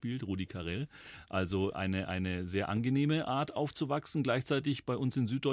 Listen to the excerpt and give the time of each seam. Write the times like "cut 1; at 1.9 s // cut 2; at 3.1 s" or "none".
cut 1; at 1.7 s